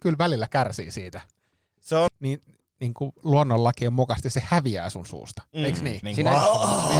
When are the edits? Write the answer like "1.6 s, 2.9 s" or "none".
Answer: 2.1 s, 6.0 s